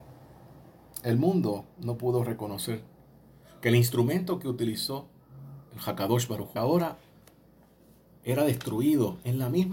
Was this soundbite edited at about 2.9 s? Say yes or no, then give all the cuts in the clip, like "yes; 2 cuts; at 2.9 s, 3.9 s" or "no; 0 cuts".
no; 1 cut; at 6.6 s